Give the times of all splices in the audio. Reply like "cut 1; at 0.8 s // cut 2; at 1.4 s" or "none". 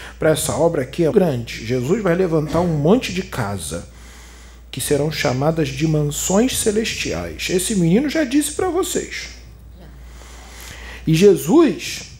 cut 1; at 1.1 s